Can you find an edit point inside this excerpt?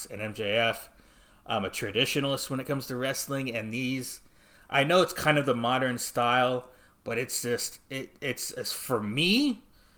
no; 0 cuts

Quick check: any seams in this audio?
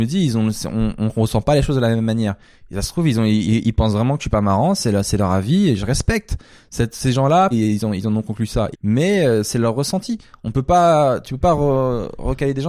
yes; 2 cuts; at 7.5 s, 8.7 s

